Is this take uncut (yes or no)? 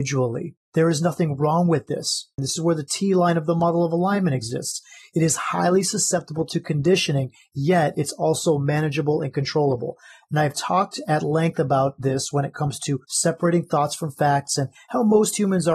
no